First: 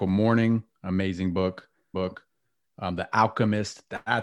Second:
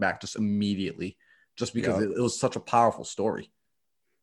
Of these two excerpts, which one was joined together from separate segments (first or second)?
first